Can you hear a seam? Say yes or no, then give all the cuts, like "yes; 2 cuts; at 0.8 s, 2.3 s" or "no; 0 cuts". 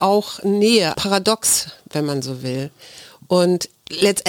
yes; 1 cut; at 0.9 s